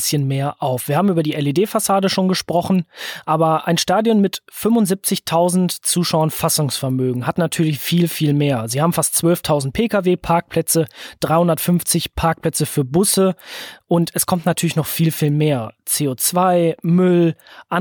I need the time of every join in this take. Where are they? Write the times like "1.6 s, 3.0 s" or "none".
none